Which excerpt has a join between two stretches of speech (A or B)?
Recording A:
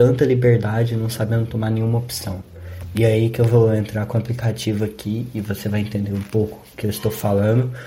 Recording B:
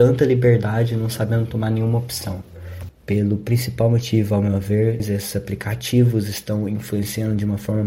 B